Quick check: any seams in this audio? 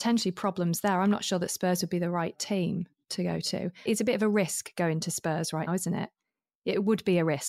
yes; 2 cuts; at 3.9 s, 5.7 s

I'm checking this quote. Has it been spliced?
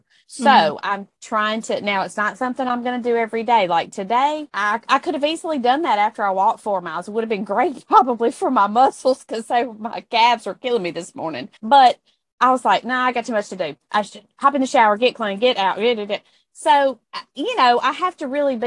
yes; 1 cut; at 11.6 s

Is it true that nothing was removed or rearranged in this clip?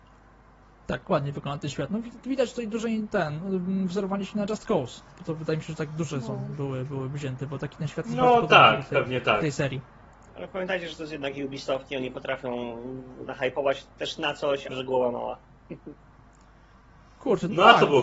no; 2 cuts; at 8.9 s, 14.7 s

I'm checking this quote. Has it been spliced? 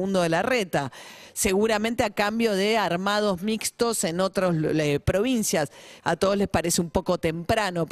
yes; 1 cut; at 6.0 s

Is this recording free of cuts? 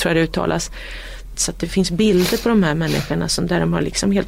no; 1 cut; at 1.3 s

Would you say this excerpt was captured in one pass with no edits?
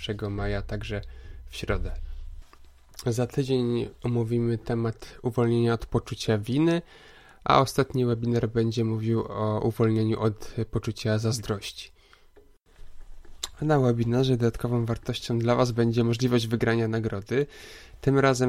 yes; 0 cuts

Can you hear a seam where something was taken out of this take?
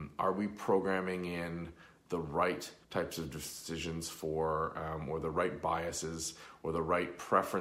yes; 1 cut; at 2.8 s

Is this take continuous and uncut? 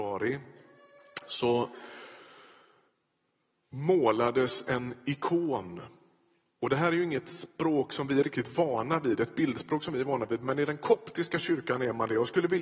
yes; 0 cuts

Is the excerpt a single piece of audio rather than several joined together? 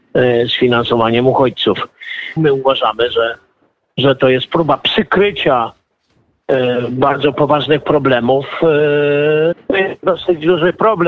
no; 2 cuts; at 2.4 s, 9.5 s

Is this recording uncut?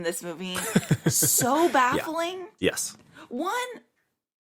no; 1 cut; at 2.6 s

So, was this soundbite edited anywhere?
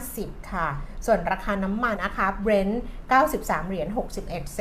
yes; 1 cut; at 2.0 s

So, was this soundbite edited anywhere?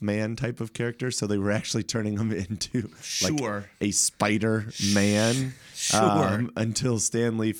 no; 0 cuts

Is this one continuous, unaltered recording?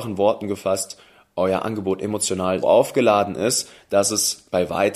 no; 1 cut; at 2.6 s

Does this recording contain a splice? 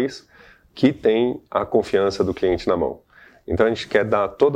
no; 0 cuts

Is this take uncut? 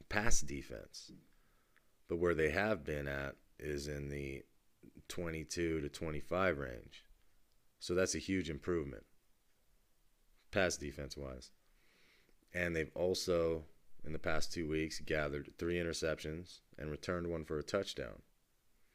yes; 0 cuts

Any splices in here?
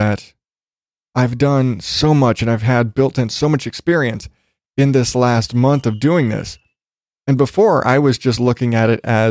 no; 0 cuts

